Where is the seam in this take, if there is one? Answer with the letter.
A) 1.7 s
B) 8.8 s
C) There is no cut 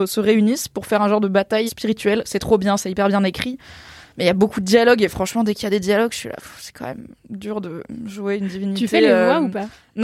A